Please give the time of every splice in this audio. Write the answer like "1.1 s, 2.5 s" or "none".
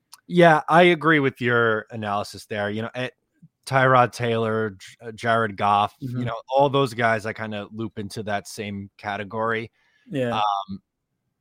none